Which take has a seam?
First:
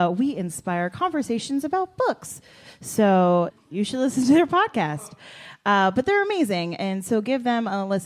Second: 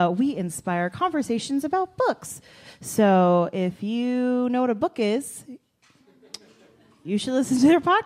first; 1 cut; at 3.5 s

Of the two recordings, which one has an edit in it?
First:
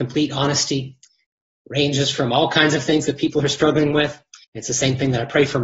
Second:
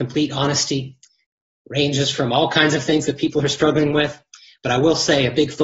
first; 1 cut; at 4.4 s

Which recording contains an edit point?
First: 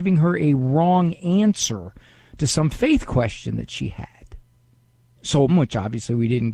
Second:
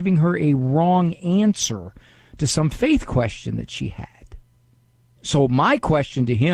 first; 1 cut; at 5.5 s

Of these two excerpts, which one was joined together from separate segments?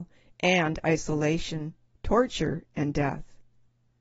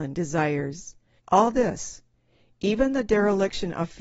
second; 1 cut; at 1.2 s

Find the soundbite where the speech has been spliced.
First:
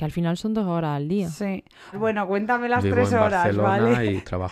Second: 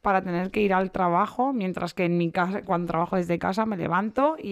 first; 1 cut; at 1.9 s

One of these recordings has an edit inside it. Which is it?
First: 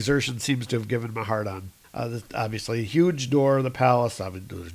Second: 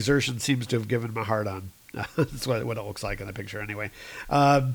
first; 1 cut; at 1.8 s

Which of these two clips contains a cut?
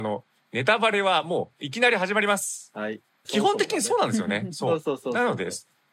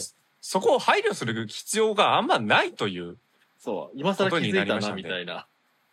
first; 1 cut; at 3.2 s

